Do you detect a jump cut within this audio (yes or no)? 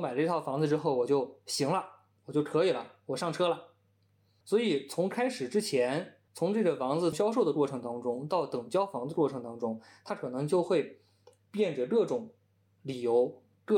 no